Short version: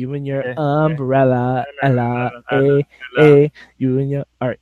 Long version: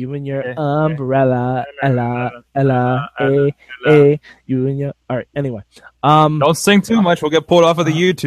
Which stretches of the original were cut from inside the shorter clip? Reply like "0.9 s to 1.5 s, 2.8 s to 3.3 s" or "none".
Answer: 2.4 s to 3.1 s

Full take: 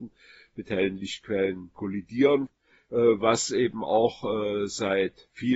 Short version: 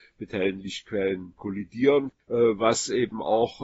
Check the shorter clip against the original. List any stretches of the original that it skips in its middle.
2.6 s to 2.8 s

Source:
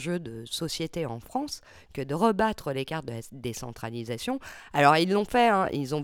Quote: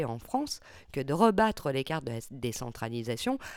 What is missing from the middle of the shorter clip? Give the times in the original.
none

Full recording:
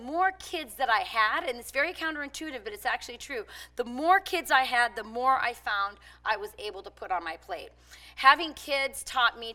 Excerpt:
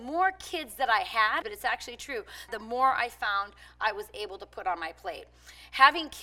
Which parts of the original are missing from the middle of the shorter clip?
1.4 s to 2.6 s, 3.7 s to 4.9 s

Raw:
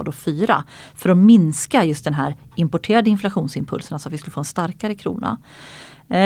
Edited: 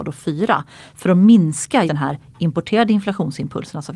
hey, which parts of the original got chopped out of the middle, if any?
1.9 s to 2.0 s

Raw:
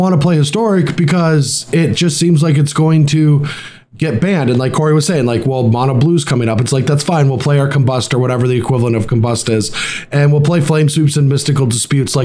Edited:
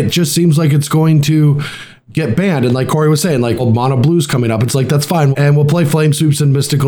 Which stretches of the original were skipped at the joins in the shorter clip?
5.4 s to 5.6 s, 7.3 s to 10.1 s

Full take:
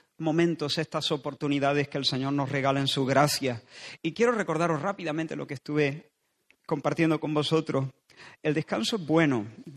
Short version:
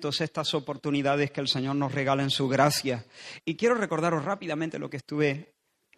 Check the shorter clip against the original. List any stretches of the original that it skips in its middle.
none

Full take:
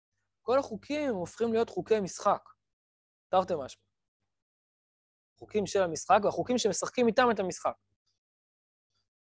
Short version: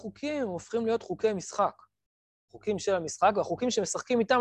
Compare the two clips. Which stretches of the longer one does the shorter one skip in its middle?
3.0 s to 5.2 s

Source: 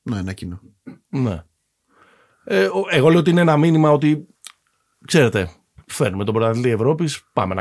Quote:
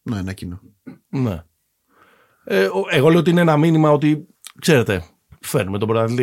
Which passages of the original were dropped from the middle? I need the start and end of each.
4.5 s to 5.0 s

